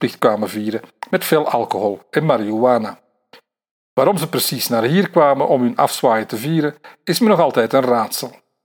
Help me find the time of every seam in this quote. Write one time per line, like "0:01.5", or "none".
none